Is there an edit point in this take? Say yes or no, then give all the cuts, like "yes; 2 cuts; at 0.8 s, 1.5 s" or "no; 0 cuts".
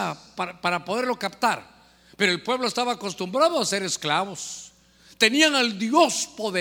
no; 0 cuts